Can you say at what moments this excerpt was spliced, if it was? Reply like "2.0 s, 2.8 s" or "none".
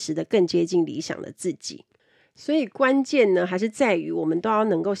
none